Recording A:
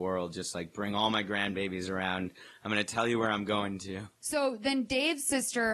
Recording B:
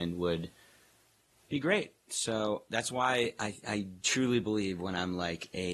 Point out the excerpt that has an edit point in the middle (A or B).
A